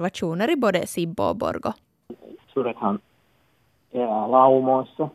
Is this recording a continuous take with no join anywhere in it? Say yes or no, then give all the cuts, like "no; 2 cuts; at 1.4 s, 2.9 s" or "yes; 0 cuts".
no; 1 cut; at 2.4 s